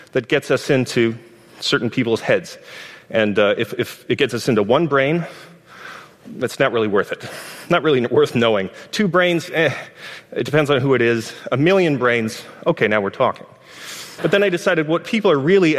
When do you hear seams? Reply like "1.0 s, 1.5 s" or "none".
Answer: 14.2 s